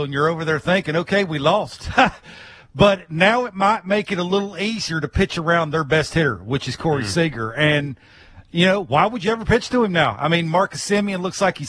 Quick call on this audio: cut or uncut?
uncut